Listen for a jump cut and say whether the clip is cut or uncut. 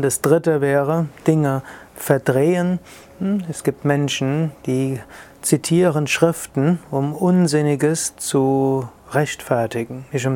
uncut